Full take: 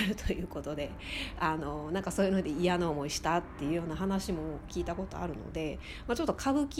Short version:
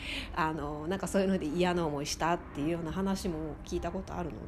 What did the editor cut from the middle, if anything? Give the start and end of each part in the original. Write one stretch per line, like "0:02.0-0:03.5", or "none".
none